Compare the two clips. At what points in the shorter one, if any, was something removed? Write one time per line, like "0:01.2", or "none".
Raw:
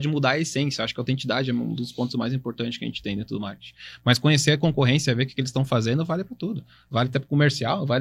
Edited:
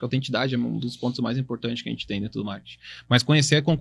none